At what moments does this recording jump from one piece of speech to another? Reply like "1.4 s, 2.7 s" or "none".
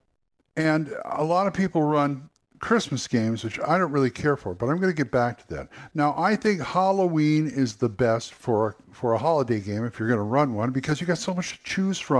none